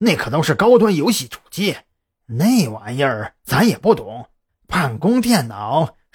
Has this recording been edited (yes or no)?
yes